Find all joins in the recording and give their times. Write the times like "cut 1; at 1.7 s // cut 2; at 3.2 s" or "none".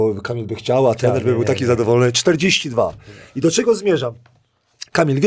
none

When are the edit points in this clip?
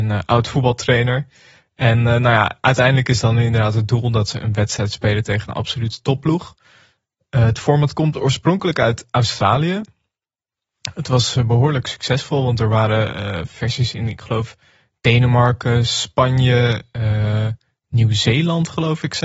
none

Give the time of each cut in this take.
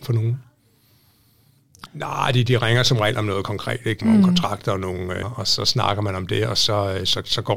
cut 1; at 1.9 s // cut 2; at 4.0 s // cut 3; at 5.2 s

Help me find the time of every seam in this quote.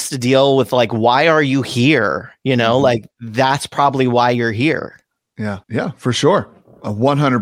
cut 1; at 5.6 s

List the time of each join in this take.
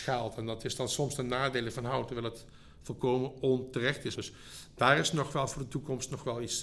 cut 1; at 4.2 s

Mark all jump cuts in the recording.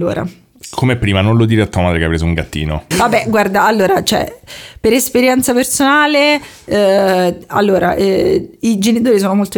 cut 1; at 2.9 s

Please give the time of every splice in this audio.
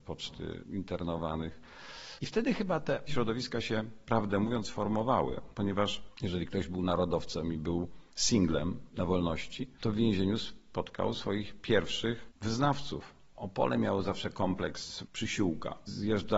cut 1; at 2.2 s // cut 2; at 13.3 s

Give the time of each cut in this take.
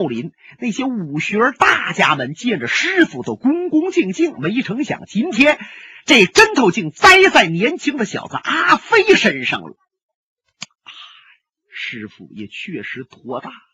none

